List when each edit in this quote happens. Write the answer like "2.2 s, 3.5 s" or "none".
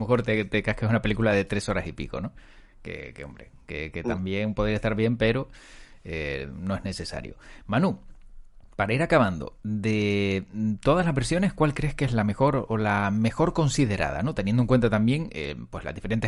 none